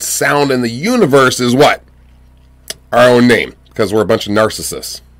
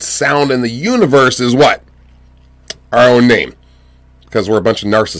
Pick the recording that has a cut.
first; 1 cut; at 3.6 s

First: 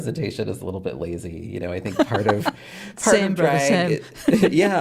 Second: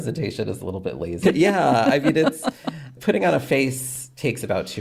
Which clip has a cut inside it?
second; 1 cut; at 1.2 s

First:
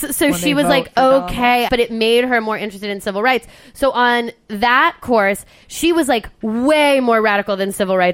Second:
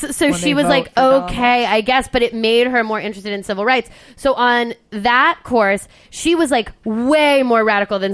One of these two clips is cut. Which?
first; 1 cut; at 1.7 s

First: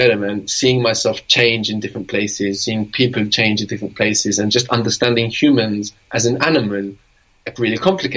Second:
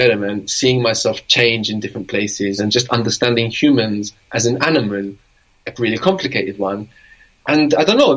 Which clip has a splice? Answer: second; 1 cut; at 2.6 s

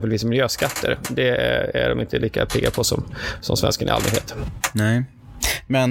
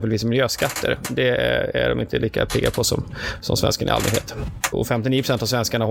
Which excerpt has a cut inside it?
second; 1 cut; at 4.7 s

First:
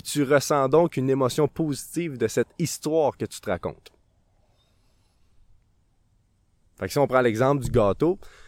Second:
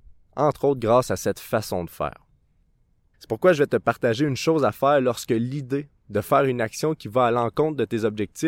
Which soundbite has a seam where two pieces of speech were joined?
second; 1 cut; at 3.1 s

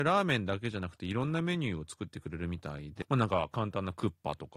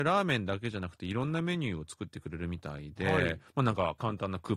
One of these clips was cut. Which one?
first; 1 cut; at 3.0 s

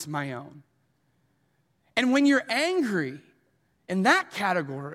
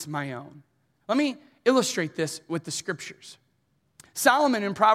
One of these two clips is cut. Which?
second; 1 cut; at 1.0 s

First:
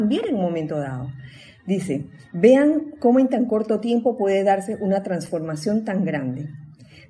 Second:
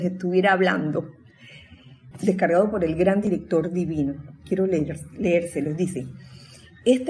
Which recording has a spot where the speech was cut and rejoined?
second; 1 cut; at 2.1 s

